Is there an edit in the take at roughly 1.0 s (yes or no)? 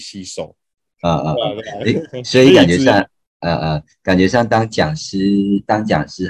yes